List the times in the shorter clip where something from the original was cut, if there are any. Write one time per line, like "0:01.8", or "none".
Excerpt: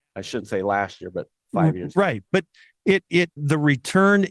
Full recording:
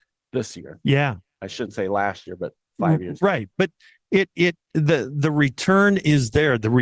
0:03.4